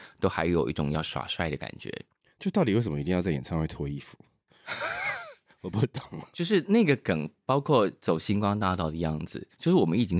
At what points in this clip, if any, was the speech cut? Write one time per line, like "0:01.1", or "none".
none